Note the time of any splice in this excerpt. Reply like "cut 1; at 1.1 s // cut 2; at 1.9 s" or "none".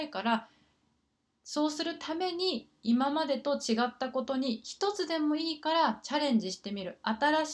none

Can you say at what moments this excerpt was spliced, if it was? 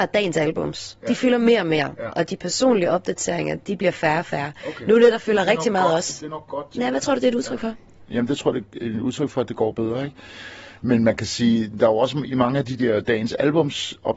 none

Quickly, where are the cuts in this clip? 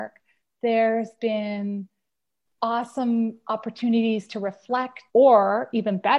cut 1; at 5.1 s

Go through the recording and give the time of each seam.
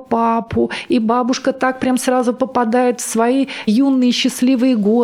none

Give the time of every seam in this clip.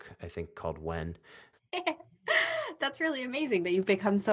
cut 1; at 1.5 s

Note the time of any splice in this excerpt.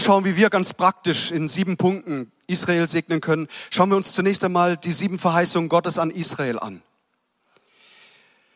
none

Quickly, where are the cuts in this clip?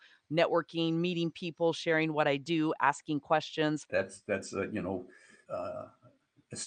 cut 1; at 3.9 s // cut 2; at 5.5 s

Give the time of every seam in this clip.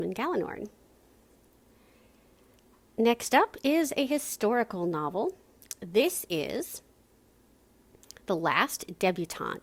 none

